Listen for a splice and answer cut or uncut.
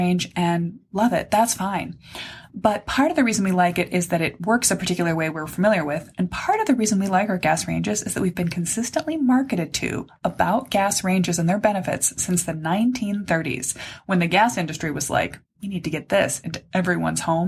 uncut